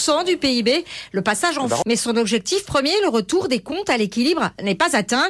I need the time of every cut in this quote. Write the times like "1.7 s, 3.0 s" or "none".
1.8 s